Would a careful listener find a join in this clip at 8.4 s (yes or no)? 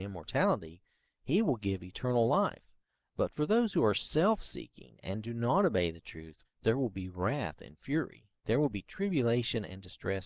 no